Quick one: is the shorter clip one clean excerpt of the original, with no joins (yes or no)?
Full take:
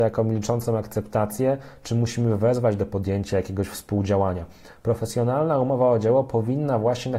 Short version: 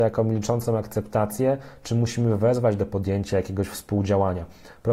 yes